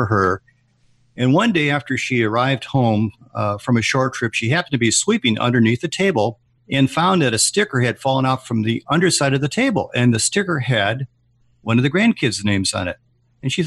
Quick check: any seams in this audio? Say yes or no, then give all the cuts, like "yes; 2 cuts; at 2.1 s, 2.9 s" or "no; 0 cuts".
no; 0 cuts